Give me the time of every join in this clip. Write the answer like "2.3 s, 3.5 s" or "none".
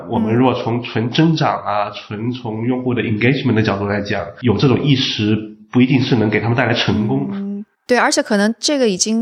7.7 s